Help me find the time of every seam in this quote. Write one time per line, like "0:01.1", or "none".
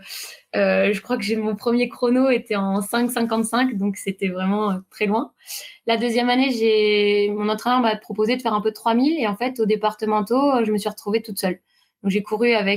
none